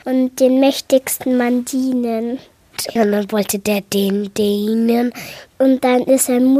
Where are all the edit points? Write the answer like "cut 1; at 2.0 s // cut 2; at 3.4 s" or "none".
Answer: cut 1; at 2.9 s